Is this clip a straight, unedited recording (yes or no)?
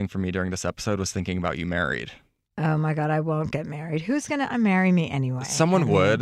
yes